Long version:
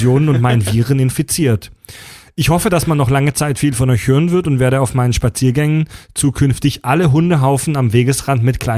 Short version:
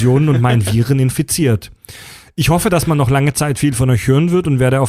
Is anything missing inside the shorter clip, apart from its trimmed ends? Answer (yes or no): no